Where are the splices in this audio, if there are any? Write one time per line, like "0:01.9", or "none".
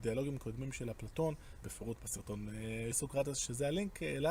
0:01.6
0:02.9